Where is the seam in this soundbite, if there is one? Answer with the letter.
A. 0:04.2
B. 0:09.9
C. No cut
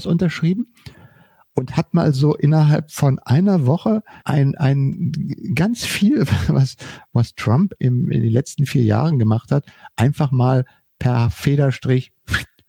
A